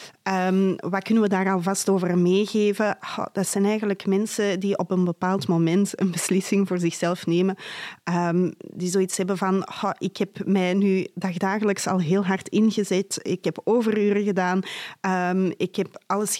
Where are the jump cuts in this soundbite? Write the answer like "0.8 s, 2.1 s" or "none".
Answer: none